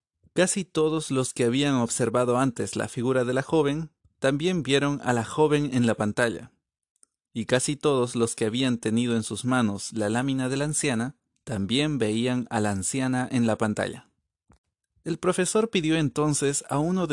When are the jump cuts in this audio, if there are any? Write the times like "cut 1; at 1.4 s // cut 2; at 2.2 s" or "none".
none